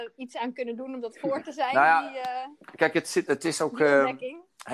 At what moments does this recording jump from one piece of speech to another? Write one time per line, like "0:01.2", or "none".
0:03.3